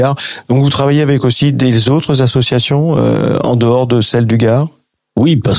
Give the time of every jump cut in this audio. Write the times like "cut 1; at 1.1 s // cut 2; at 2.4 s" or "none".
none